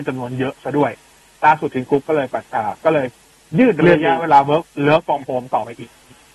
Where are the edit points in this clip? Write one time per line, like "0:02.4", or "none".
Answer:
none